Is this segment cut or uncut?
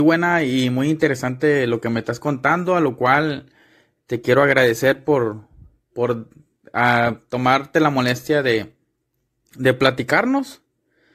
uncut